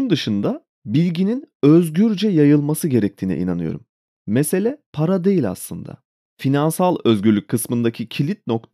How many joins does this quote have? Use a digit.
1